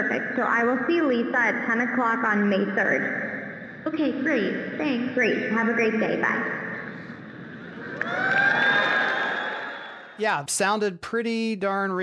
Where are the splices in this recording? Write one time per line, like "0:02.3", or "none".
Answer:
0:10.5